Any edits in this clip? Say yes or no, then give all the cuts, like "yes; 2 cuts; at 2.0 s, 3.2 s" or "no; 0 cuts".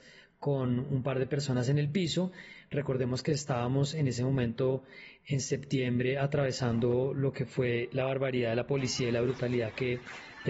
no; 0 cuts